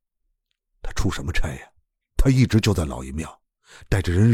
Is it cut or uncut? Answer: uncut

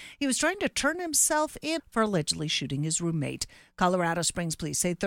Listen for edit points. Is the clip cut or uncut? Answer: cut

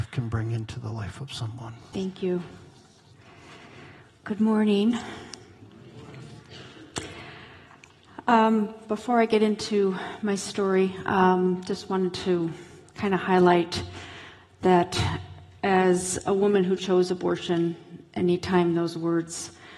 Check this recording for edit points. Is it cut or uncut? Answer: cut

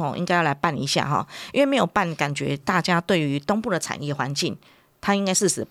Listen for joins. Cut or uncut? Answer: uncut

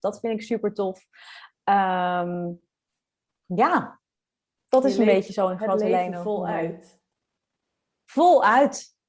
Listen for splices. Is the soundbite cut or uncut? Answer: uncut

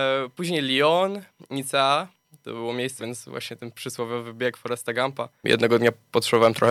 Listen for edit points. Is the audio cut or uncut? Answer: cut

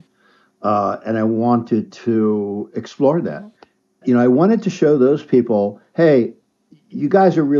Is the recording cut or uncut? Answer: cut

